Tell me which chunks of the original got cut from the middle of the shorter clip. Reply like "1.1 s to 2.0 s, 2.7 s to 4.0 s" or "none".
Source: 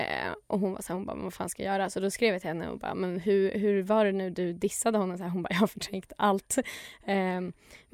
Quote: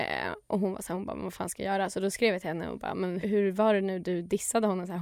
3.2 s to 3.5 s